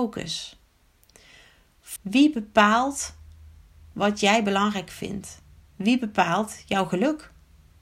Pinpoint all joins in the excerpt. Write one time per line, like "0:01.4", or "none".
0:02.0